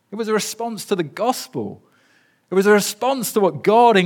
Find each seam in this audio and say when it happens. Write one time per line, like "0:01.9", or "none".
none